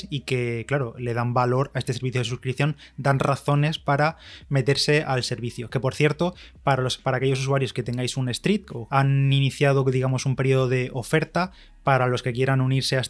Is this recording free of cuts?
no; 1 cut; at 8.9 s

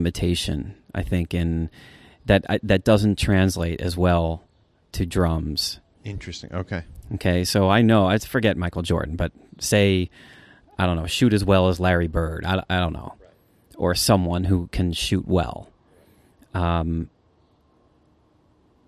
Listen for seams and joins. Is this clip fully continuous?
yes; 0 cuts

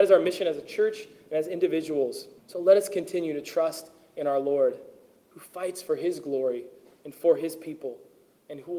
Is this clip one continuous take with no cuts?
no; 1 cut; at 2.4 s

